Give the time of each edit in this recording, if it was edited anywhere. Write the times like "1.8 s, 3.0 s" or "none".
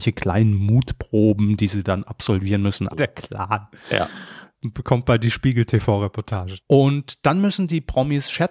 2.9 s, 6.6 s

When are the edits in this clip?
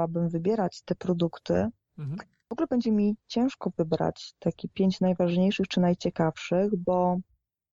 2.4 s

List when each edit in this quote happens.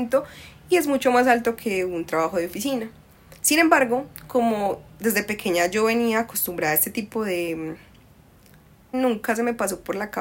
8.9 s

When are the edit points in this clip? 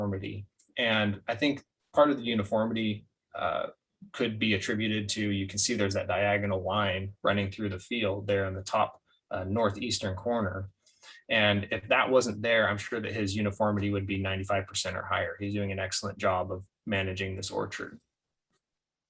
none

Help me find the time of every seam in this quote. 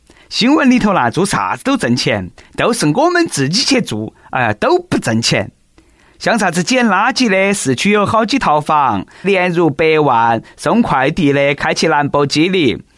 9.2 s

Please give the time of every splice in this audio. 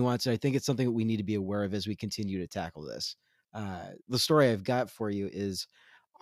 4.0 s

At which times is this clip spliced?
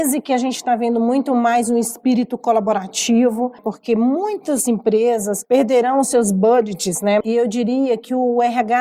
3.6 s, 7.2 s

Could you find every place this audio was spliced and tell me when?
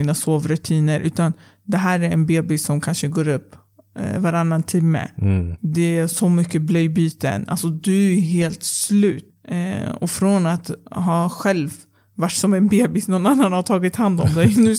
none

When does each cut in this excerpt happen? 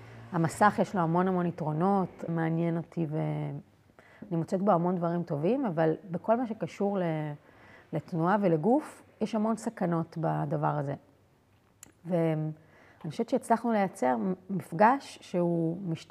2.3 s

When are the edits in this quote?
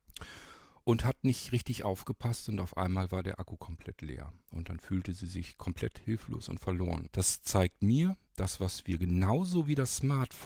7.0 s, 8.2 s

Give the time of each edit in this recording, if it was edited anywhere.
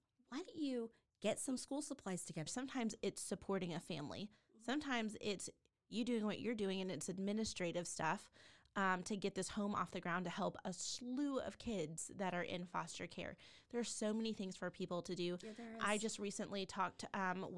2.5 s

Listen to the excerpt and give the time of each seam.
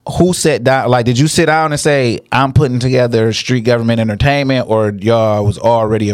none

